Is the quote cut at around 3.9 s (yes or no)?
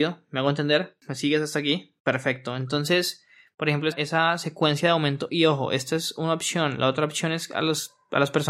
yes